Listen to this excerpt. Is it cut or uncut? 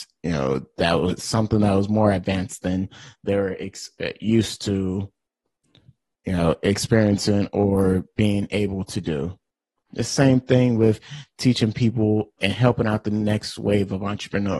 cut